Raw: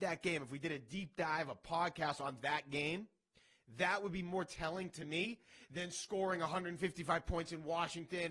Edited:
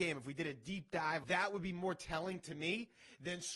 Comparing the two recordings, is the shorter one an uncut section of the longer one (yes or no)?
no